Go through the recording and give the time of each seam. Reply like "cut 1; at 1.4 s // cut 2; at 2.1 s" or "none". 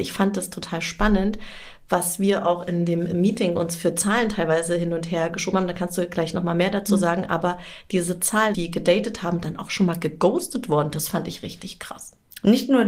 cut 1; at 8.5 s